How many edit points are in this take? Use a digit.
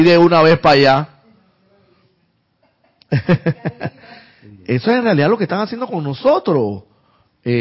0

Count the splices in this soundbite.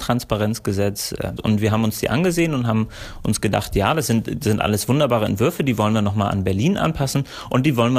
1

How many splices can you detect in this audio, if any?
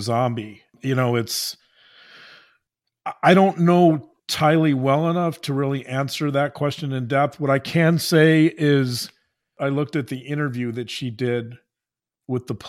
0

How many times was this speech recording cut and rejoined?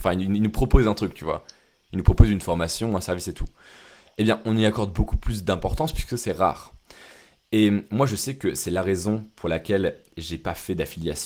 0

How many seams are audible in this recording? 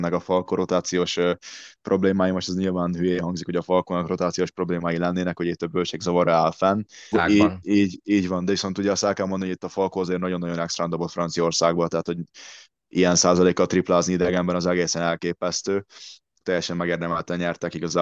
2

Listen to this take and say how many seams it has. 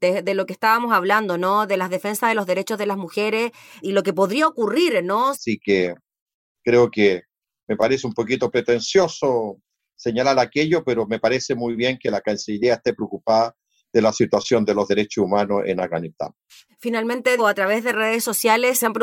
2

